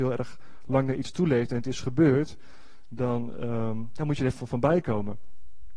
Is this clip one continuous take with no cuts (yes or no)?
yes